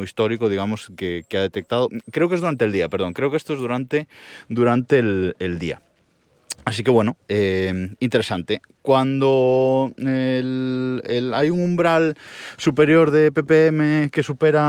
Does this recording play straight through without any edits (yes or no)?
yes